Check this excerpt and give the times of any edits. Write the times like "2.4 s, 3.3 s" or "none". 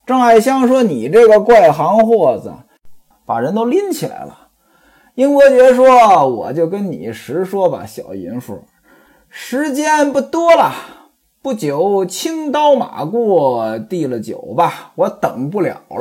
3.1 s